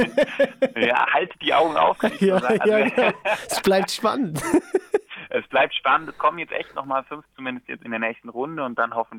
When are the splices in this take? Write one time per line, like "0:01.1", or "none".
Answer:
0:07.3